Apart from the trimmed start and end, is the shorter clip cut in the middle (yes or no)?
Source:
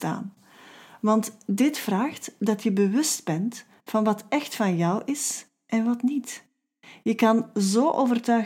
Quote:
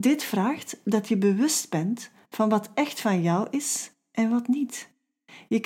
no